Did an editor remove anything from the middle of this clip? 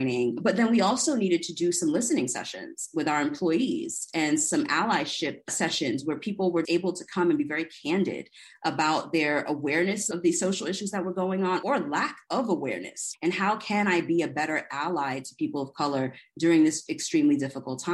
yes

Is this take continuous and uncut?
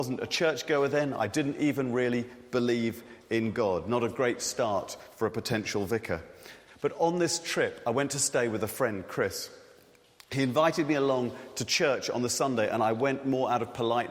yes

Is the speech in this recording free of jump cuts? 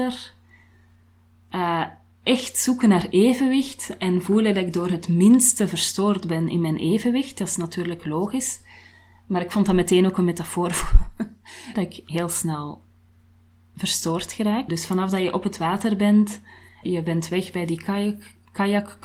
no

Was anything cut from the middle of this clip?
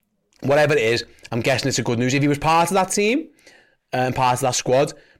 no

